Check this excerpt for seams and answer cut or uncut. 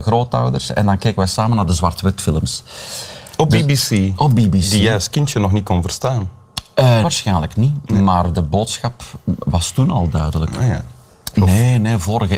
cut